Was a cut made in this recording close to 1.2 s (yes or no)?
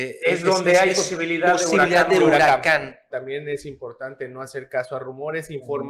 no